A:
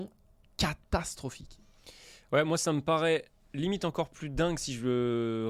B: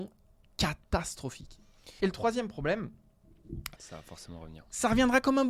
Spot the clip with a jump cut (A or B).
B